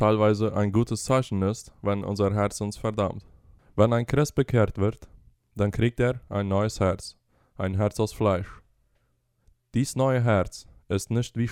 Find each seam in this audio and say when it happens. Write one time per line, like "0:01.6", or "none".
0:03.6

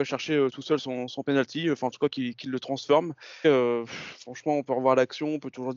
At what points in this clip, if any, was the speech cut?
0:03.4

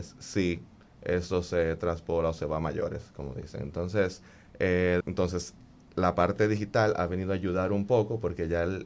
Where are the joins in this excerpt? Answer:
0:05.0

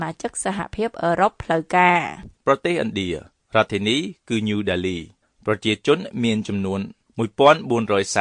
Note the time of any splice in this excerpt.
0:02.3

